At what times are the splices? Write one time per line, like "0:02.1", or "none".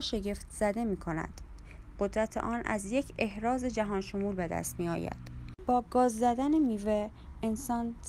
none